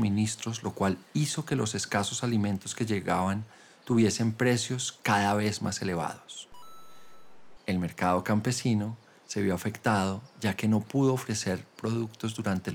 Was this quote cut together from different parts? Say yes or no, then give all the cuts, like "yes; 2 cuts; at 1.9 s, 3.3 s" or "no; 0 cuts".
yes; 1 cut; at 7.6 s